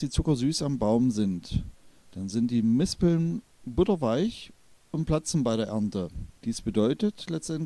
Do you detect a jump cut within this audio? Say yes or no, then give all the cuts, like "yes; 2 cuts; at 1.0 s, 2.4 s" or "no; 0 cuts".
yes; 1 cut; at 6.3 s